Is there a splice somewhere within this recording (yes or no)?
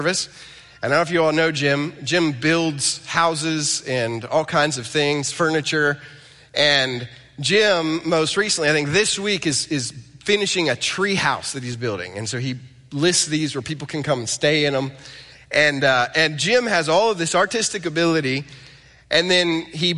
no